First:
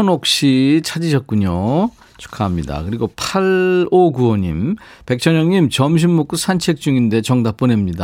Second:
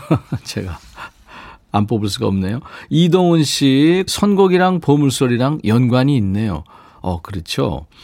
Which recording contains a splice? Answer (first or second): second